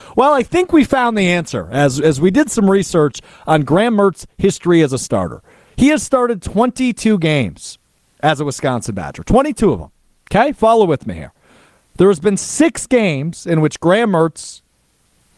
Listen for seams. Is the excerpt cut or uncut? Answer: uncut